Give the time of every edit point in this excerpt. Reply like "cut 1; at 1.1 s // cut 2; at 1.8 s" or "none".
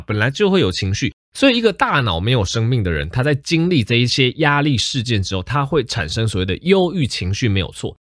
none

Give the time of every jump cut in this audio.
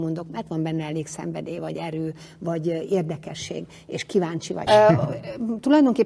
cut 1; at 4.7 s

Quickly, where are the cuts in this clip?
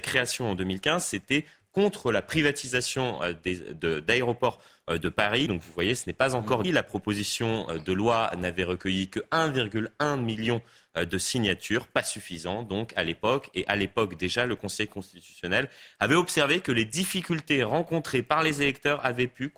cut 1; at 5.5 s // cut 2; at 6.6 s

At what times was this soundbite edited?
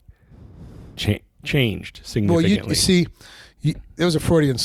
none

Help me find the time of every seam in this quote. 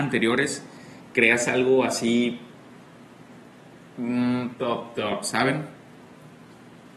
cut 1; at 4.6 s

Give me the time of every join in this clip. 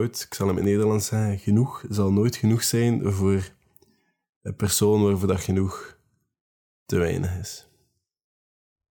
none

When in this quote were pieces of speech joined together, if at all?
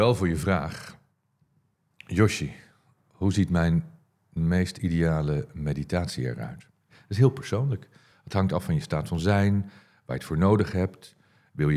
none

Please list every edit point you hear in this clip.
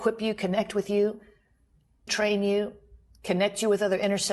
cut 1; at 2.1 s

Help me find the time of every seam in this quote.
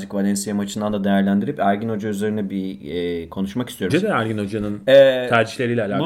cut 1; at 3.9 s

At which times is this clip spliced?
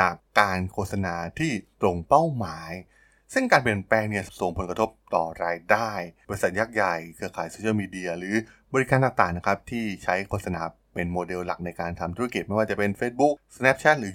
none

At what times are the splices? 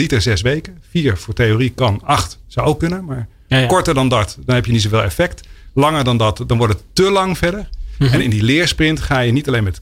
none

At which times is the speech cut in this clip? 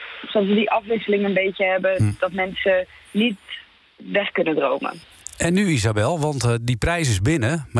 none

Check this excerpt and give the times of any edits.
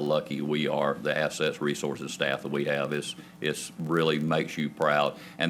none

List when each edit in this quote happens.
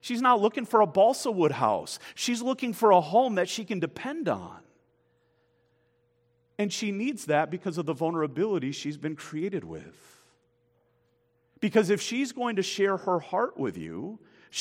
none

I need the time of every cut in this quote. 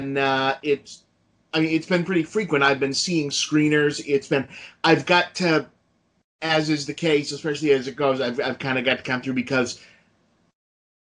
none

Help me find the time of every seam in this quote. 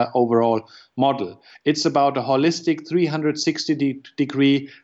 cut 1; at 1.5 s

